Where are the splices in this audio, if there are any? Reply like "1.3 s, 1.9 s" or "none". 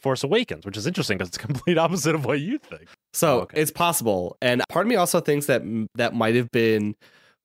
2.9 s, 4.6 s